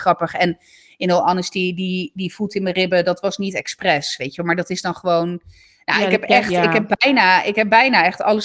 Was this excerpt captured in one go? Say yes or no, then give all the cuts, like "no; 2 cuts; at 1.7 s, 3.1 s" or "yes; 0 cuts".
yes; 0 cuts